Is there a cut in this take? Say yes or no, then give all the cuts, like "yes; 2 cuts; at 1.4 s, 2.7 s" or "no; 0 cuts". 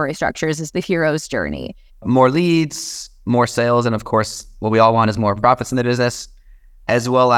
yes; 1 cut; at 1.9 s